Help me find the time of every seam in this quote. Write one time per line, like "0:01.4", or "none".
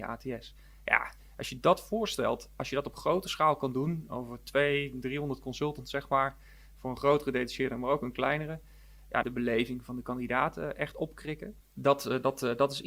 0:09.2
0:11.6